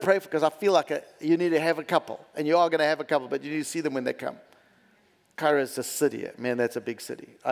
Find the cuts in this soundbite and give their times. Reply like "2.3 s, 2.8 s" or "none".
5.2 s